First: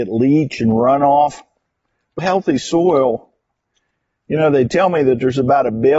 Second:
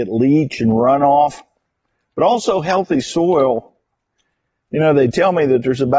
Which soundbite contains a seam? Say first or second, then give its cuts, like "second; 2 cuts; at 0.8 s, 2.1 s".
first; 1 cut; at 2.2 s